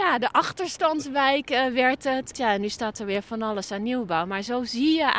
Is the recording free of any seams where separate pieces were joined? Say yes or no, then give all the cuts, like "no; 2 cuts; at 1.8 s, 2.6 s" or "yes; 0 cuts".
no; 1 cut; at 2.3 s